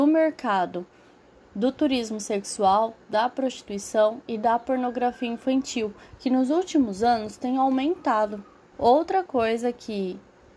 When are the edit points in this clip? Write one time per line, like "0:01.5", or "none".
0:08.7